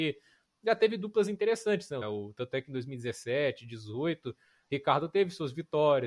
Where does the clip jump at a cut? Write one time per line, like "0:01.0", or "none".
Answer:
0:02.0